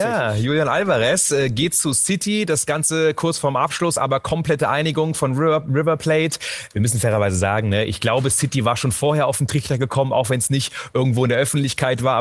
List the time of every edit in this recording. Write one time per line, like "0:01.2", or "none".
none